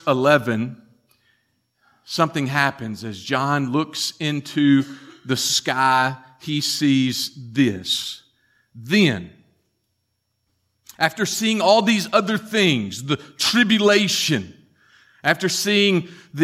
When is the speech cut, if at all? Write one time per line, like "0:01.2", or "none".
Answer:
none